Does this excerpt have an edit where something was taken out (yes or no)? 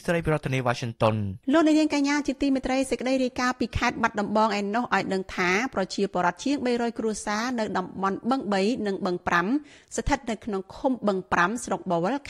yes